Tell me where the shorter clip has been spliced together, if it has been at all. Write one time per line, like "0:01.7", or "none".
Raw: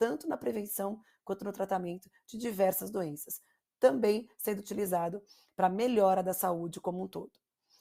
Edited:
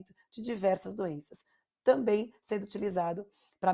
none